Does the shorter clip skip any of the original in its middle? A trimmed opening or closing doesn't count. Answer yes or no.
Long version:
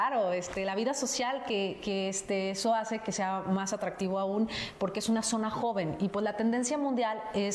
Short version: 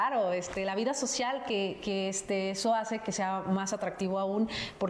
no